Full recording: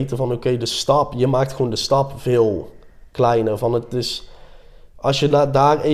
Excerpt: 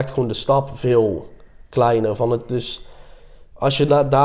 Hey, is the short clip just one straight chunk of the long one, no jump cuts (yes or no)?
yes